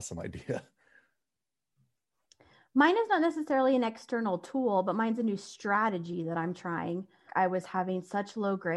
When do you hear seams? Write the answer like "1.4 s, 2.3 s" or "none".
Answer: 7.3 s